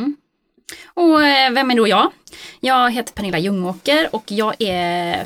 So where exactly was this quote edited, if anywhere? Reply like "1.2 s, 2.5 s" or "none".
none